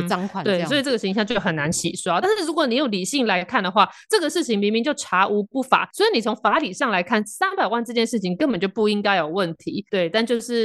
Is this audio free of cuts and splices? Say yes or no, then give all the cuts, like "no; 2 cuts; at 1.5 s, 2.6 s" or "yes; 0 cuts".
yes; 0 cuts